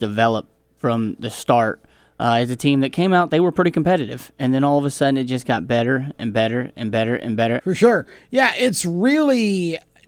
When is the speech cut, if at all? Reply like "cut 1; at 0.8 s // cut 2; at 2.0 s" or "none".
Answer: cut 1; at 7.6 s